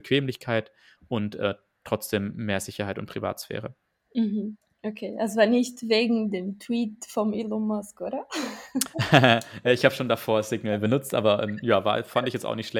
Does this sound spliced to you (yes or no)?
no